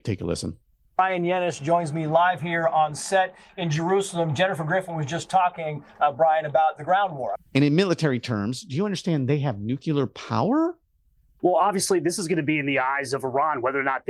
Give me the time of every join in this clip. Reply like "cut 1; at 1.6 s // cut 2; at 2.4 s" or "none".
cut 1; at 7.4 s // cut 2; at 11.4 s